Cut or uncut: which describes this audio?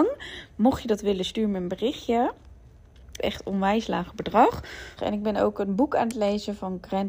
cut